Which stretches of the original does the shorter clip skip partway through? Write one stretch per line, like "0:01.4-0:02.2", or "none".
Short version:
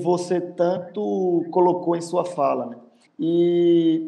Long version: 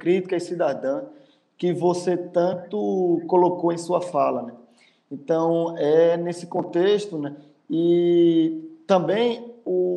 0:04.8-0:07.6